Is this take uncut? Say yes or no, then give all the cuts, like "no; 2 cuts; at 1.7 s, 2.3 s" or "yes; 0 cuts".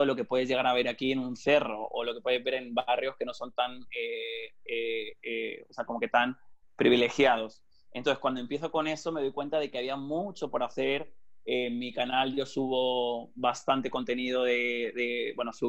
yes; 0 cuts